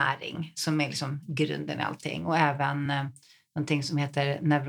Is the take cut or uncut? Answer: uncut